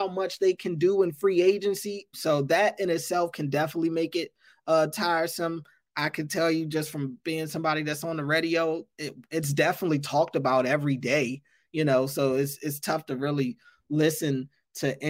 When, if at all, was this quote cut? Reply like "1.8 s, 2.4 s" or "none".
2.1 s, 8.9 s